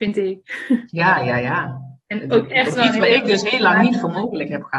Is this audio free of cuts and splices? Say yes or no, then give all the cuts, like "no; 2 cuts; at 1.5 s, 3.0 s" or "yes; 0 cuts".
yes; 0 cuts